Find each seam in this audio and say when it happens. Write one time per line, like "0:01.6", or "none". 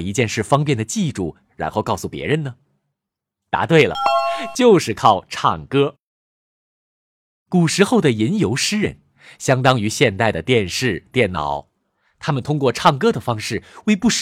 none